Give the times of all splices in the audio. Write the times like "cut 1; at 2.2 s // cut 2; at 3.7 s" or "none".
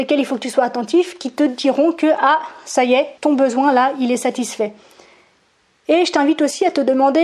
cut 1; at 3.2 s